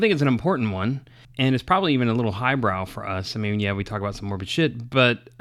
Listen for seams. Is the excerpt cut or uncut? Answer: uncut